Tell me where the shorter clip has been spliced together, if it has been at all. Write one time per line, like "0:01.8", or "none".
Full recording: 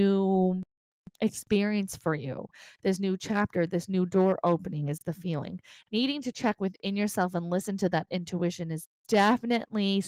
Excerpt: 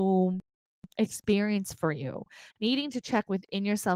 0:02.5